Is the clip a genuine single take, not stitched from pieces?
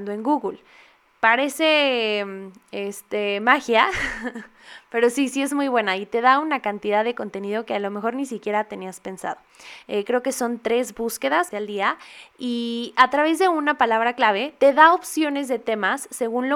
no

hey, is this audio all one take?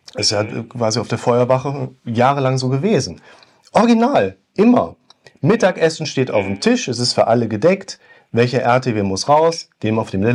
yes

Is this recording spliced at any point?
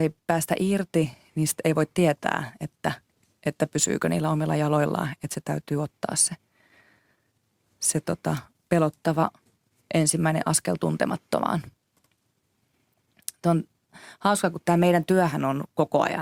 no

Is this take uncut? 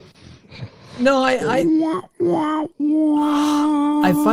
yes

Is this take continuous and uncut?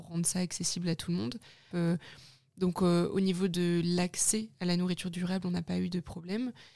no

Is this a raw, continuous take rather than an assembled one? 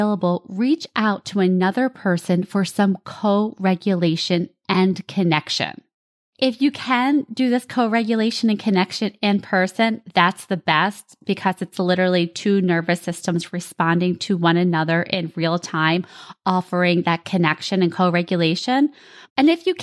no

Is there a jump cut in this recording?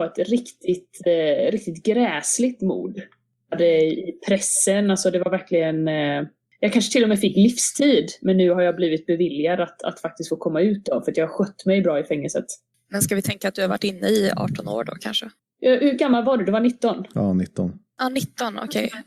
no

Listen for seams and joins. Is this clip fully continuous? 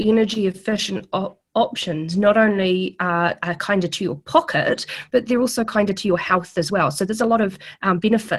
yes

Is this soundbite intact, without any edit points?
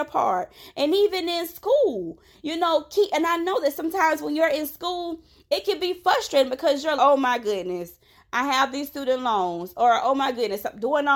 no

